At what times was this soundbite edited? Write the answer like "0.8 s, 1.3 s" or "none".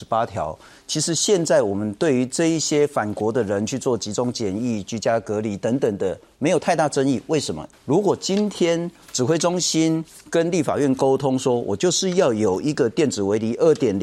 7.7 s